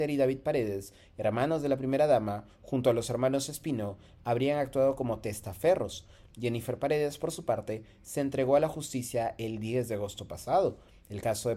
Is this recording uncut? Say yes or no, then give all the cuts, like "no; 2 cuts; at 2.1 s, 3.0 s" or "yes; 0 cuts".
no; 1 cut; at 6.3 s